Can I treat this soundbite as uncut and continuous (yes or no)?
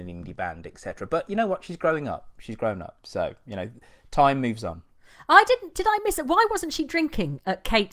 yes